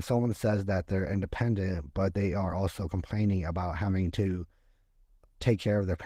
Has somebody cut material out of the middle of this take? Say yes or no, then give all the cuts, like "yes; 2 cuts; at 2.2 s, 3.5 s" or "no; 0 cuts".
no; 0 cuts